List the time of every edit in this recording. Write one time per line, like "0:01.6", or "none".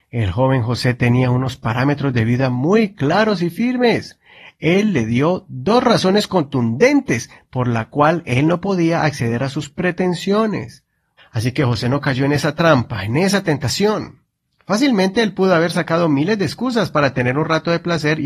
0:11.2